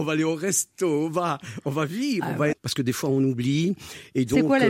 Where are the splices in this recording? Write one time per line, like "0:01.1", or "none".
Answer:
0:02.5